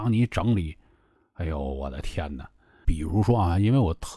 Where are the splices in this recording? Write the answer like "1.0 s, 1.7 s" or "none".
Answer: 2.8 s